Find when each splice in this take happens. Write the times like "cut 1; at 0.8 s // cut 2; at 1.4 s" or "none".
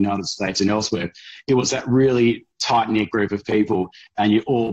none